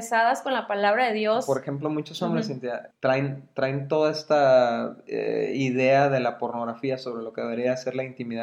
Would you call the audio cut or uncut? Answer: cut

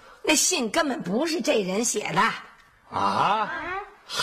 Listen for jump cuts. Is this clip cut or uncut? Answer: uncut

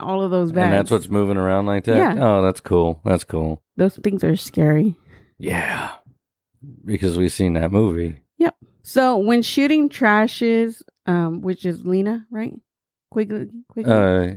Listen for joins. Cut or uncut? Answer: uncut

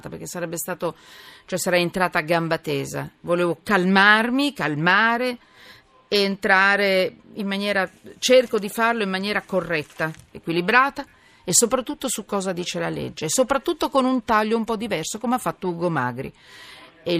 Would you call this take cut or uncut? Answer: uncut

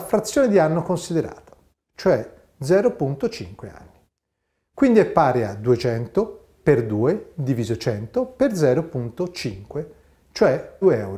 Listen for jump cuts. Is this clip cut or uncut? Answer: cut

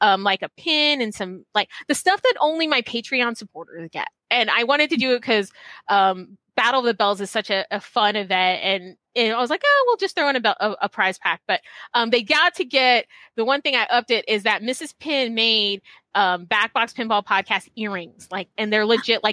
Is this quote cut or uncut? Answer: uncut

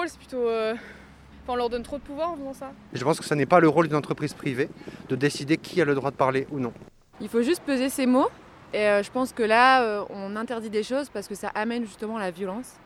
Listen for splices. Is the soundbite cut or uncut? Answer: cut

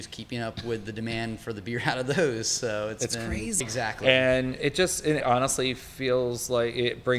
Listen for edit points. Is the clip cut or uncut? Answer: cut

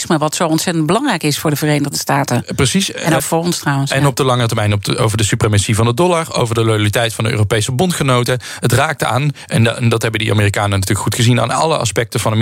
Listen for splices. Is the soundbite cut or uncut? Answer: cut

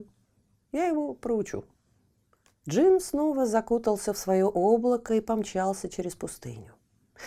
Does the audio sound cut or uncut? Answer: cut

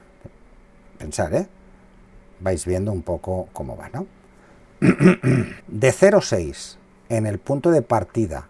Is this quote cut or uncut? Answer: cut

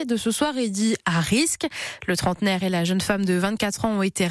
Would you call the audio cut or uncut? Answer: cut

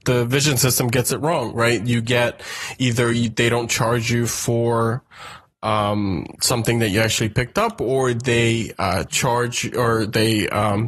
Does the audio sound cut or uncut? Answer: uncut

